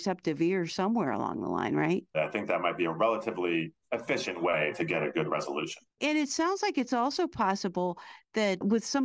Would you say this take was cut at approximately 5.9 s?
no; 1 cut; at 2.1 s

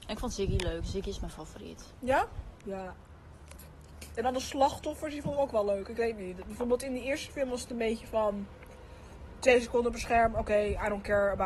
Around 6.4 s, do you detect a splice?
no; 1 cut; at 2.6 s

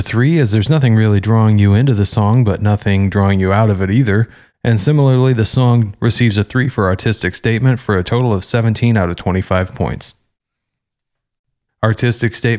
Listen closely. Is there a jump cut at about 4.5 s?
no; 1 cut; at 11.7 s

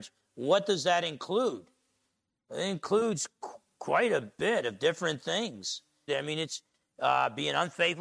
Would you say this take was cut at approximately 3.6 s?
no; 1 cut; at 6.1 s

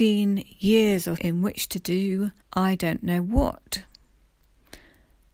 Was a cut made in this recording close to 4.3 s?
no; 2 cuts; at 1.2 s, 2.4 s

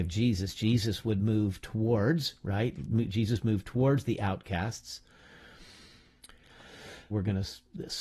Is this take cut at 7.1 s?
yes; 1 cut; at 7.1 s

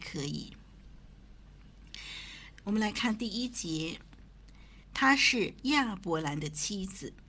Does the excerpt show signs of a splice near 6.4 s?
no; 2 cuts; at 2.5 s, 4.8 s

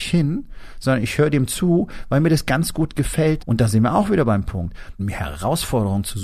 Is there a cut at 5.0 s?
yes; 2 cuts; at 3.4 s, 5.0 s

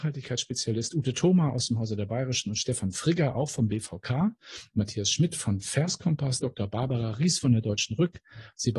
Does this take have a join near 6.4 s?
yes; 2 cuts; at 4.7 s, 6.4 s

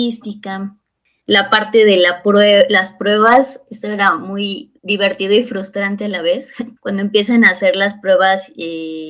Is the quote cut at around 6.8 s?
yes; 1 cut; at 6.8 s

